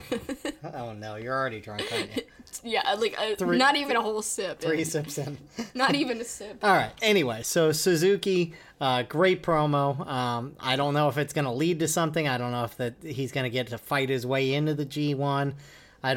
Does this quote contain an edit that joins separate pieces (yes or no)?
no